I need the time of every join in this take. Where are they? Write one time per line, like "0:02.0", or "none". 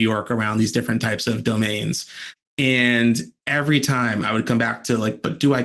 0:03.4